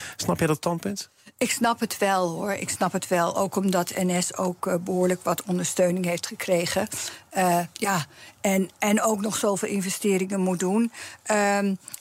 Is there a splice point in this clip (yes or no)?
no